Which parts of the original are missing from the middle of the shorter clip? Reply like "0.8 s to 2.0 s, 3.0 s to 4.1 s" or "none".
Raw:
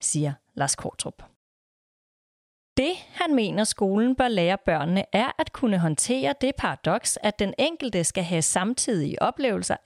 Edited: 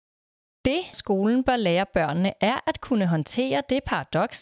3.1 s to 3.7 s